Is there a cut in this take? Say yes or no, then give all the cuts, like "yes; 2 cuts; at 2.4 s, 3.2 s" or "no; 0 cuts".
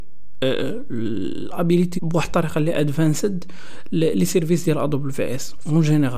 yes; 1 cut; at 2.0 s